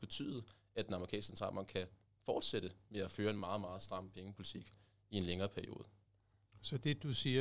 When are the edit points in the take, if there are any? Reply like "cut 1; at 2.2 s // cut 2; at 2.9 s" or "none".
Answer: none